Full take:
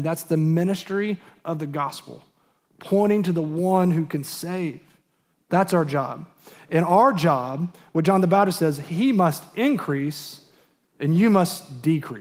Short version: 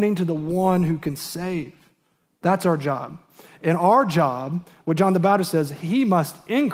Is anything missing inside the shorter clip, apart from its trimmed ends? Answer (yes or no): no